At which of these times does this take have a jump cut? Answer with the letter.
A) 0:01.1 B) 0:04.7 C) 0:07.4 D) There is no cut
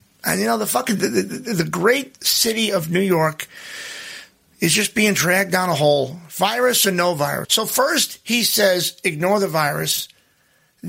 C